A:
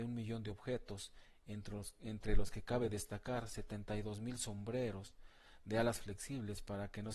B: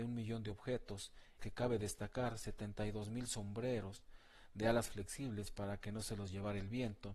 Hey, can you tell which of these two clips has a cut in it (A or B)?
B